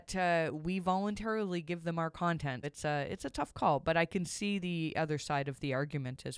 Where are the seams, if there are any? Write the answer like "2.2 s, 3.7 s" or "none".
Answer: 2.6 s